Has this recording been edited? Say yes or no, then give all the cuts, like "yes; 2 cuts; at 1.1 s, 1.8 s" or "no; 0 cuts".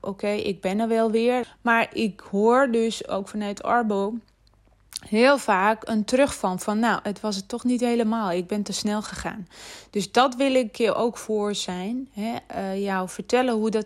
yes; 1 cut; at 1.4 s